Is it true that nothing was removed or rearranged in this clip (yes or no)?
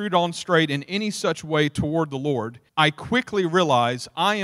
no